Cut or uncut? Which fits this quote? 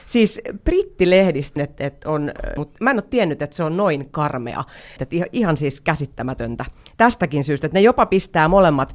cut